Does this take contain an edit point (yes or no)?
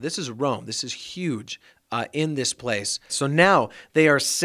yes